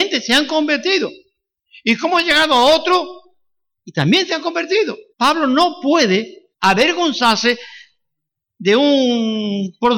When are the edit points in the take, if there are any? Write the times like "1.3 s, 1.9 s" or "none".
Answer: 5.1 s, 6.5 s